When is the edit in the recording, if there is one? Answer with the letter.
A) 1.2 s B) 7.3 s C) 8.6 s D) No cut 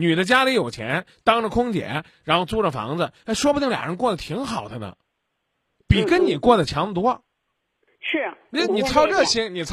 C